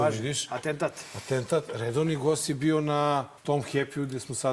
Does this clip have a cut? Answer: yes; 1 cut; at 3.4 s

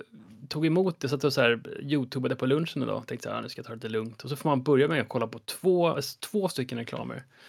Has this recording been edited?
yes; 1 cut; at 5.9 s

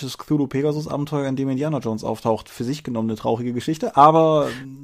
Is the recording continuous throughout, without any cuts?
yes; 0 cuts

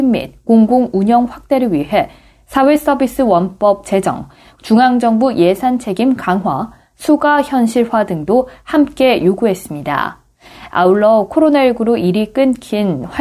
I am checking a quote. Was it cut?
no; 0 cuts

